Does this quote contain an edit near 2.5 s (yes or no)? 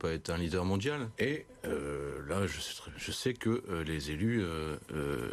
no